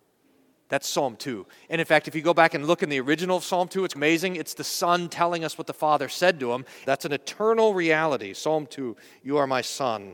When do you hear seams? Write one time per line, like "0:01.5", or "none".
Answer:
0:03.9
0:06.8